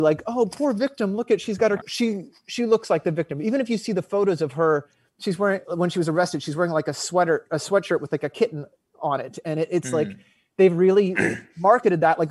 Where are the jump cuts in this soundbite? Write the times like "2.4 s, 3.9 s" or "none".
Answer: 1.8 s

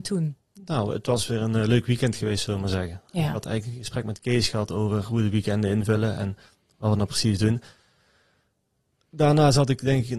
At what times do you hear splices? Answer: none

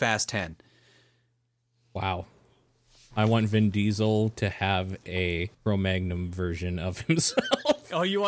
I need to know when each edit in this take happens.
3.1 s, 5.5 s

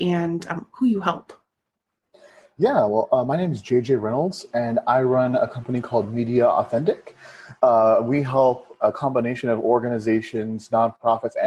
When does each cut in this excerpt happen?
8.8 s

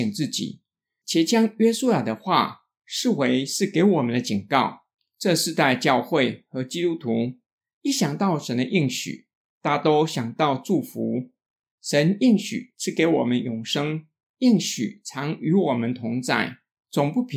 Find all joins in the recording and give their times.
none

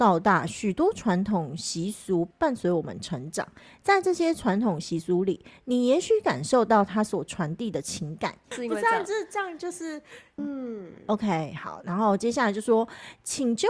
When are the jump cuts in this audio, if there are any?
8.5 s, 10.4 s

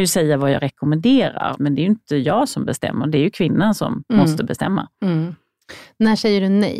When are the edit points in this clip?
1.5 s

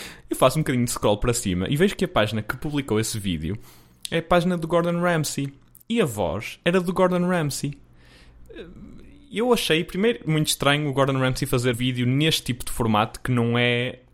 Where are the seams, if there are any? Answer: 11.7 s

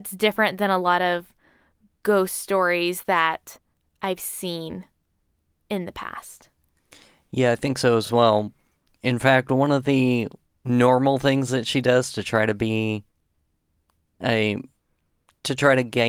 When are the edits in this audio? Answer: none

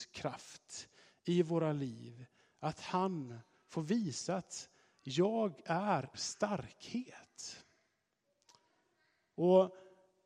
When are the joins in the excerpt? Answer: 6.1 s

